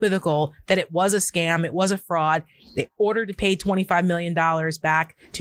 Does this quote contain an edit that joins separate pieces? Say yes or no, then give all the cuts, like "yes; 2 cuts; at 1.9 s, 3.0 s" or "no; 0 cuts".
no; 0 cuts